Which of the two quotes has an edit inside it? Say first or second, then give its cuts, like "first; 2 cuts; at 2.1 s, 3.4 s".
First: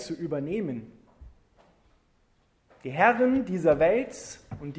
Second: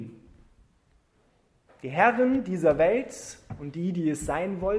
first; 1 cut; at 2.7 s